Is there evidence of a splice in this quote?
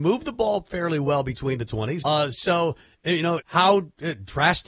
yes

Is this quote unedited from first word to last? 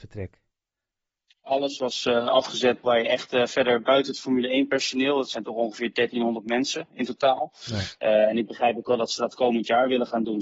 no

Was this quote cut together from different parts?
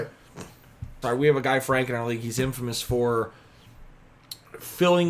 yes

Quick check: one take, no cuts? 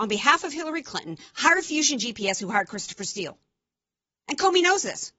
yes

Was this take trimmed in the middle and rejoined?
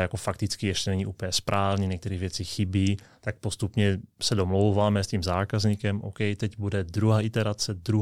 no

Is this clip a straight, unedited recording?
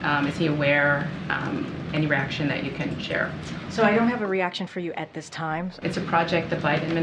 no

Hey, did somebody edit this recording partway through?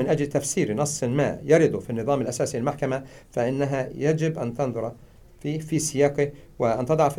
no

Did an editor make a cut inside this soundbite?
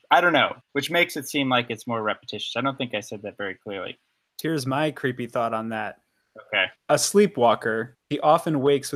yes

